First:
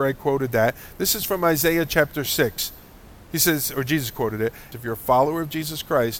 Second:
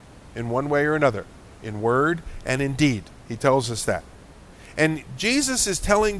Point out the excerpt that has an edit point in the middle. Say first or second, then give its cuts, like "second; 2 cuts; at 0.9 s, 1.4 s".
first; 1 cut; at 4.7 s